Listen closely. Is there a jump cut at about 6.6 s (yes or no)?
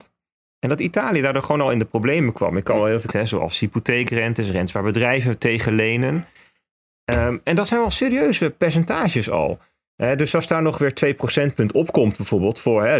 no